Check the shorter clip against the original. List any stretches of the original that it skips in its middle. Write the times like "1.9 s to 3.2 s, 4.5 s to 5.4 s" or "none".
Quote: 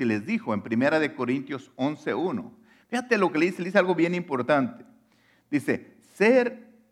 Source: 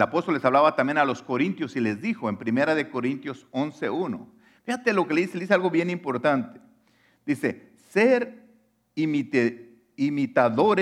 none